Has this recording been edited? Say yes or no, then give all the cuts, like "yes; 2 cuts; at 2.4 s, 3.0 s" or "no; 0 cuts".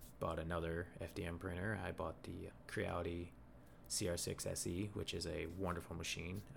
no; 0 cuts